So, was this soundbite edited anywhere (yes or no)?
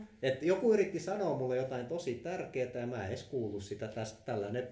no